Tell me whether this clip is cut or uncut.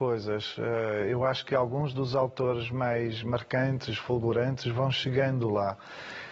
uncut